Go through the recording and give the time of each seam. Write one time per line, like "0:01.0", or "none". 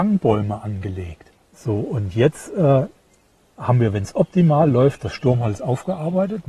0:01.4